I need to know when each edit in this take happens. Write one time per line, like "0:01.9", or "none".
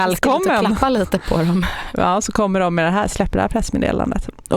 none